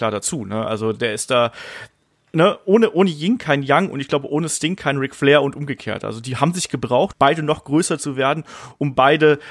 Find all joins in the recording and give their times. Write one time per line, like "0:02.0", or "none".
0:07.1